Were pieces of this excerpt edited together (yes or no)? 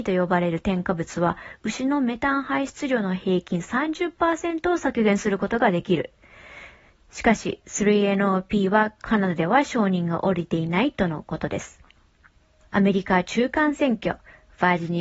no